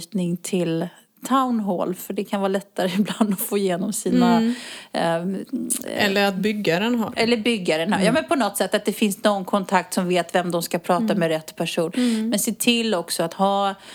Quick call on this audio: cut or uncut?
uncut